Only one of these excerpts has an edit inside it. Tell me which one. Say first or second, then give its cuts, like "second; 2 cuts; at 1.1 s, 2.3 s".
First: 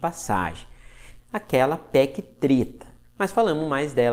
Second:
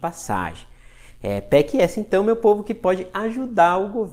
first; 2 cuts; at 1.2 s, 3.0 s